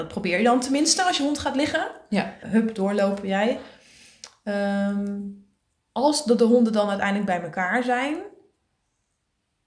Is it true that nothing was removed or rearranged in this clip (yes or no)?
no